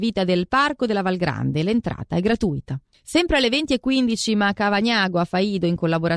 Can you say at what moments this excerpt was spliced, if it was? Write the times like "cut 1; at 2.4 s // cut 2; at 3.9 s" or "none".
none